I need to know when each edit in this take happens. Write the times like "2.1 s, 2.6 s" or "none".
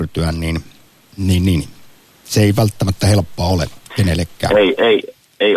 3.8 s